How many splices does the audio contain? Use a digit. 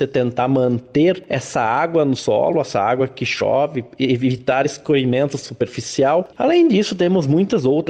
1